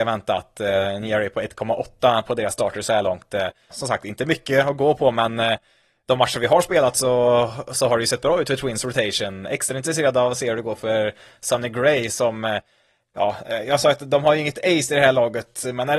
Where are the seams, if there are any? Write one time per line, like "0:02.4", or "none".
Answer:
0:03.7